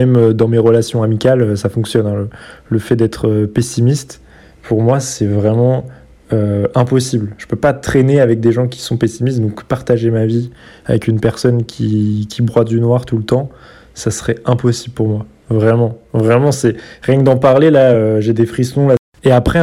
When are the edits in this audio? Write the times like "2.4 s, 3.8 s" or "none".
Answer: none